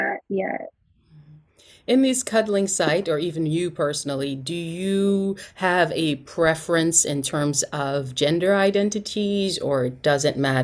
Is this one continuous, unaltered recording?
yes; 0 cuts

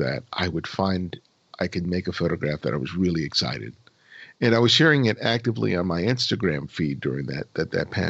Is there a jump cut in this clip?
no; 0 cuts

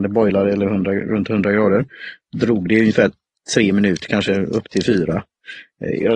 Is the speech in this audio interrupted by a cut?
no; 0 cuts

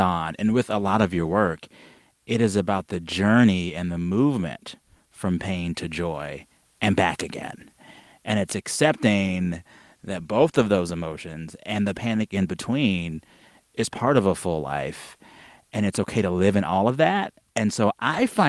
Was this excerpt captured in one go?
yes; 0 cuts

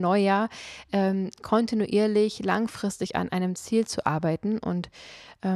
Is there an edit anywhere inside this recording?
no; 0 cuts

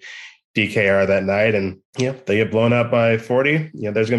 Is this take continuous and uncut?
no; 1 cut; at 1.9 s

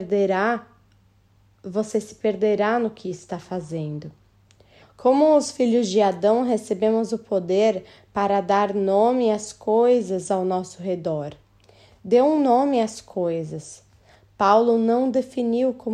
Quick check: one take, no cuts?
no; 1 cut; at 4.8 s

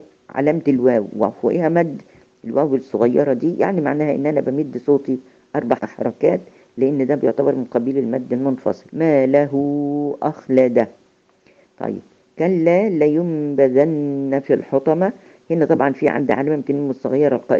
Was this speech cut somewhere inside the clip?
yes; 2 cuts; at 5.8 s, 8.9 s

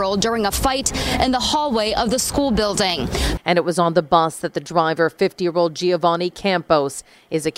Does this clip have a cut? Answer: yes; 1 cut; at 3.4 s

